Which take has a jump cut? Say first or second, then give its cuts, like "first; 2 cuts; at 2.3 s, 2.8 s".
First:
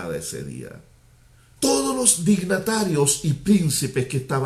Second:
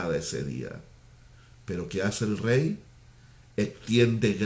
first; 1 cut; at 1.6 s